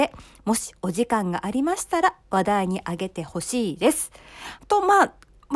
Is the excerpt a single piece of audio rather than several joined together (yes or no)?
no